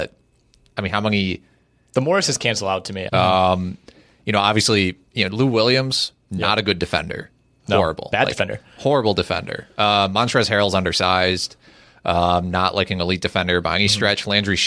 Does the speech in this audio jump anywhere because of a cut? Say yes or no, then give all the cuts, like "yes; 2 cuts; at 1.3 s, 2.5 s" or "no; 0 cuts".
yes; 1 cut; at 3.1 s